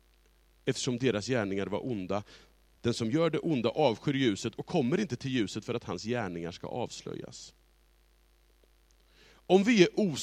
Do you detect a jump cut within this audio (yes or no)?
no